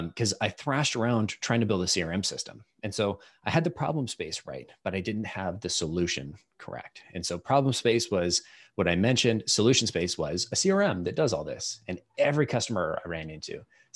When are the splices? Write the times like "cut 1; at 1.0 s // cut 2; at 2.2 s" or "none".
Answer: none